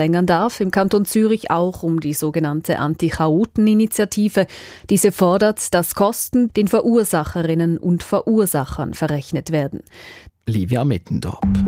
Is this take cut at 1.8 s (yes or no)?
no